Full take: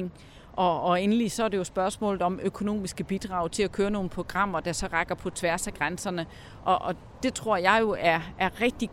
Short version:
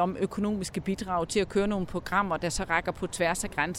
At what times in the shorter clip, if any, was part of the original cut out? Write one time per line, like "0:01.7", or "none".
none